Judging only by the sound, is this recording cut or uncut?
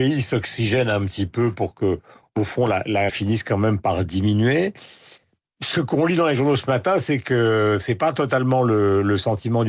cut